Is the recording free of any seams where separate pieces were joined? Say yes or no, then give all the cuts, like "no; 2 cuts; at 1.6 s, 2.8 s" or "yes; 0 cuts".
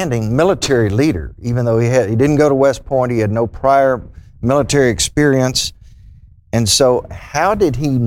yes; 0 cuts